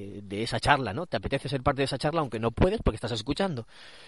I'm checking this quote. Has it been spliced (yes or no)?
no